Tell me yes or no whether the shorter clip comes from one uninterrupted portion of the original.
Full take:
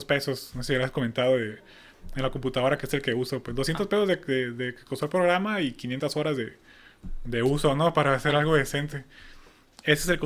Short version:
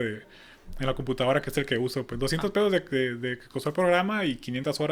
yes